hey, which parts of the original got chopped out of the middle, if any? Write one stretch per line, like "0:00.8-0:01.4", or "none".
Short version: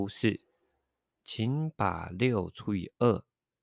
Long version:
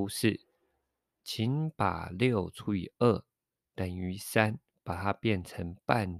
none